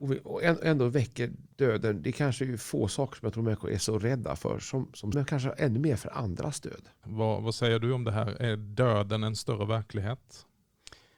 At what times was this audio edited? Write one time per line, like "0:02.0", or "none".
0:05.1
0:07.0